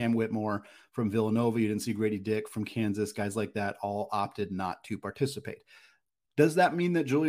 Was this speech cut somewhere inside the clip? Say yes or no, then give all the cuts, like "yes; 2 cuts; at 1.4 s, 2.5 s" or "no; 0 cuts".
no; 0 cuts